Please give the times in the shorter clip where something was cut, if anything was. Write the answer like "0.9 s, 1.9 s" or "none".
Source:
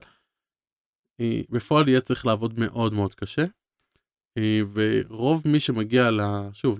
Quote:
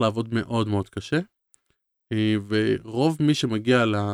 none